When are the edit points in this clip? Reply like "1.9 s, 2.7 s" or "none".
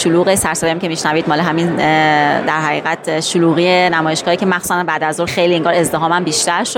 5.3 s

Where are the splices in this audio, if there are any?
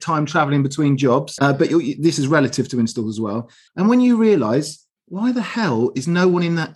1.4 s, 3.7 s

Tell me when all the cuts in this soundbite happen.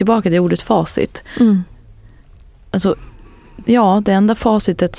3.6 s

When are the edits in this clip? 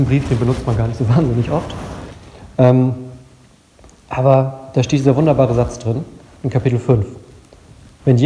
none

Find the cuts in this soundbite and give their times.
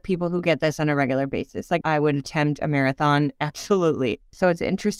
1.8 s

